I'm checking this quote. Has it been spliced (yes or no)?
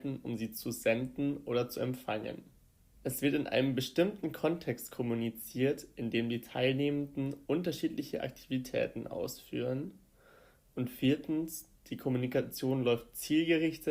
yes